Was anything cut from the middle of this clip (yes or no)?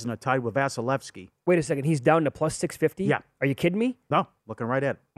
no